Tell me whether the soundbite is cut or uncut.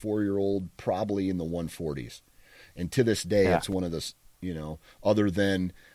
uncut